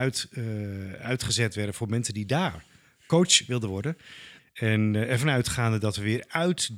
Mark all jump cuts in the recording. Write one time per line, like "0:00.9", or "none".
0:04.4